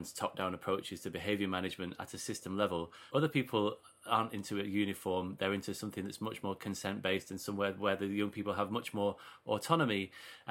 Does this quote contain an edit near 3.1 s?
yes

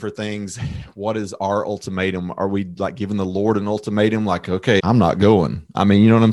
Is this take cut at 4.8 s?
yes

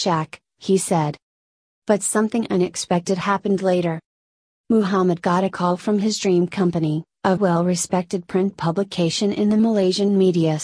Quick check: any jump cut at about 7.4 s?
yes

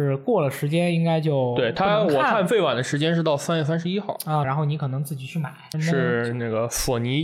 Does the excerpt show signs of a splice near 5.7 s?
yes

